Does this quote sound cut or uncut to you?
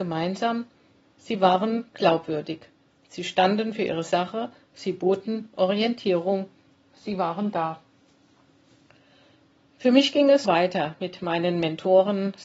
cut